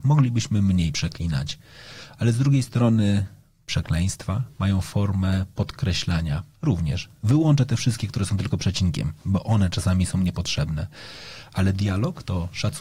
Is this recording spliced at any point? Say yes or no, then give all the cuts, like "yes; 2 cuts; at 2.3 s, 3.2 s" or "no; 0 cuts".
no; 0 cuts